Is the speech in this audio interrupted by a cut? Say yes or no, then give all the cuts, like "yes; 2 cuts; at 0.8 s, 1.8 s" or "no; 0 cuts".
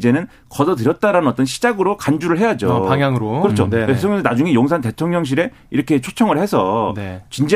no; 0 cuts